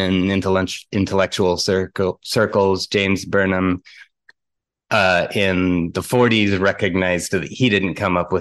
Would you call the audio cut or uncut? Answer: uncut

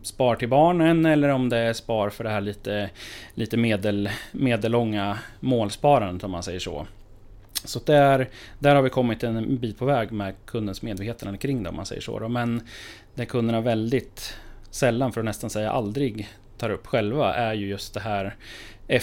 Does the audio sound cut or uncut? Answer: uncut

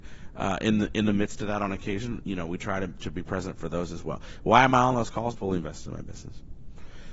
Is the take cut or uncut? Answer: cut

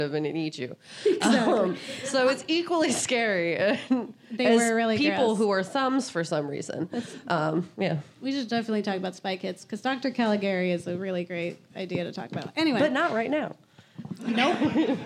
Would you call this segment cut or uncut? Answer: uncut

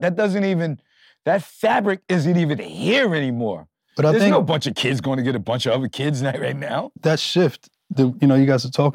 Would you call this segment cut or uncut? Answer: uncut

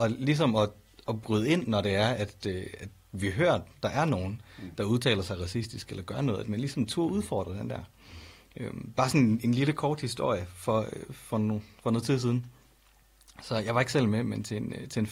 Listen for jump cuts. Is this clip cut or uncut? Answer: uncut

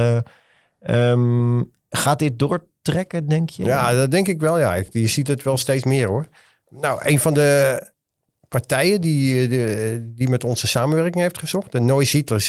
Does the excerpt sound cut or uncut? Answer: uncut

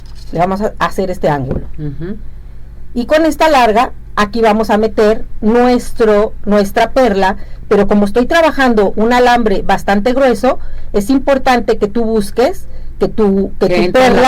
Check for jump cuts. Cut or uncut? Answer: uncut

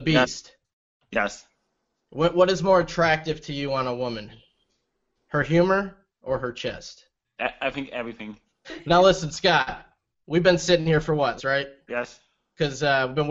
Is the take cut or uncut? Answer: cut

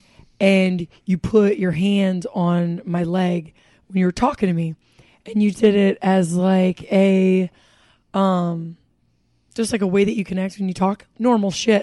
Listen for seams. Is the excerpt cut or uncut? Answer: cut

